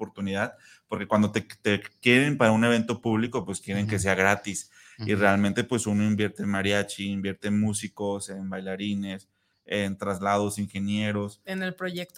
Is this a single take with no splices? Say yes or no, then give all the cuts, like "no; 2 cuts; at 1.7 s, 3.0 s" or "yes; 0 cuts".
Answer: yes; 0 cuts